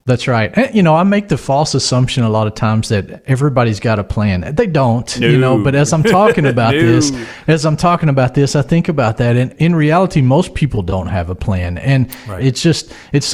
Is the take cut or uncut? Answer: cut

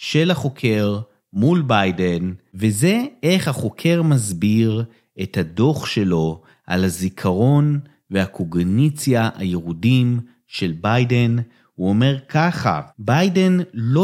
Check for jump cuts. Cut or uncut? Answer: cut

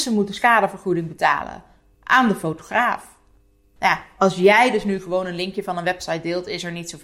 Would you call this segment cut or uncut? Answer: uncut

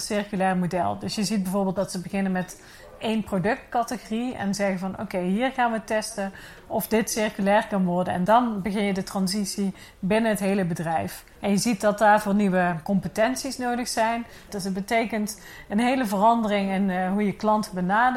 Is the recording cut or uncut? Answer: cut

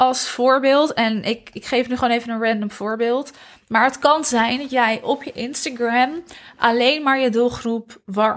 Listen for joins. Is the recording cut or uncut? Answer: uncut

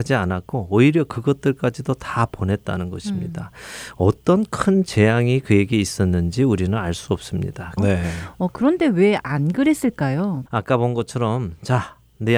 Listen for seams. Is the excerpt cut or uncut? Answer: cut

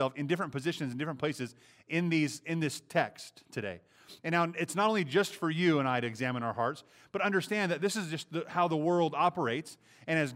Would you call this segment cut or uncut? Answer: uncut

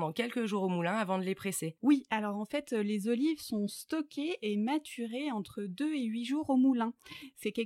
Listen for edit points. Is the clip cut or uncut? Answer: cut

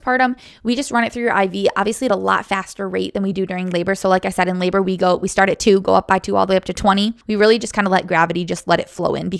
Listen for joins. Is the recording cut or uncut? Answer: uncut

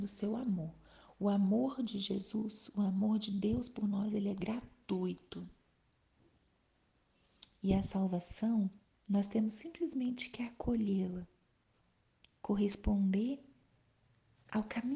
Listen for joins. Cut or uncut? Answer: uncut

